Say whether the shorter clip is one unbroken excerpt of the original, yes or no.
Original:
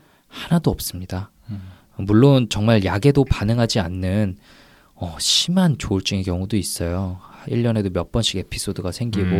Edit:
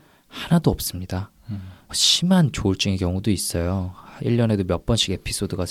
no